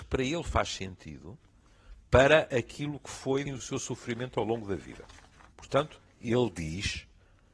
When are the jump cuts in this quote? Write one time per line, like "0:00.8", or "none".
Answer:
0:03.5